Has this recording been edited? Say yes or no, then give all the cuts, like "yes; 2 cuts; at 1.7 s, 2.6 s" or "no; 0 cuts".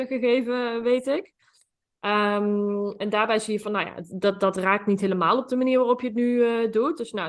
no; 0 cuts